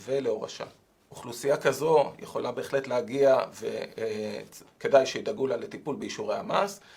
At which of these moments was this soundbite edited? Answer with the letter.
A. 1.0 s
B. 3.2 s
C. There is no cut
A